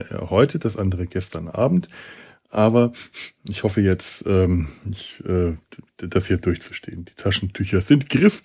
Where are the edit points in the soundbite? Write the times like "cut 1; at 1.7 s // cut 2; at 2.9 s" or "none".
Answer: none